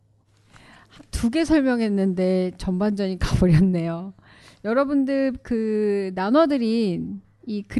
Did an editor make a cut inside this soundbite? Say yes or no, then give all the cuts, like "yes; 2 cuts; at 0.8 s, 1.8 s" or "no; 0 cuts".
no; 0 cuts